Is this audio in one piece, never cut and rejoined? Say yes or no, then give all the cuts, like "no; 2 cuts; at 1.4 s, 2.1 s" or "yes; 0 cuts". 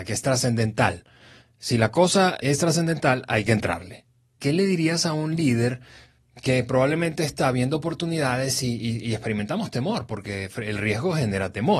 no; 2 cuts; at 2.4 s, 4.4 s